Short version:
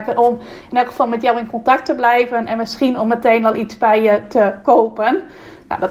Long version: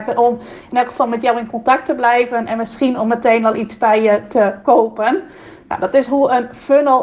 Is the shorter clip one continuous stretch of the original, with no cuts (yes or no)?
yes